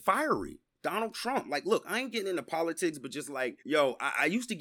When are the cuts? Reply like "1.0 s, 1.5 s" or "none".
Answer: 3.6 s